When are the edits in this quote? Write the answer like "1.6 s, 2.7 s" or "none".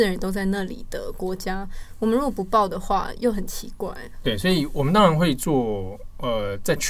none